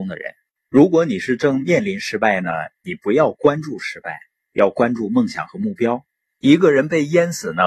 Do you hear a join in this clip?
yes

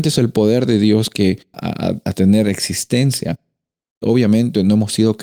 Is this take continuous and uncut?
no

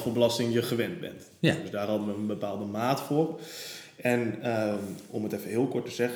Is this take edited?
no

